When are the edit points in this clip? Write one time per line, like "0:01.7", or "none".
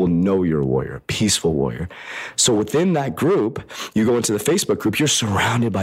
none